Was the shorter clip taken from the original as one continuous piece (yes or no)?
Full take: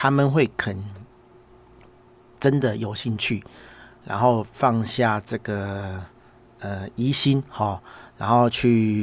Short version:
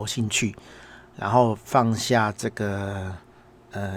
yes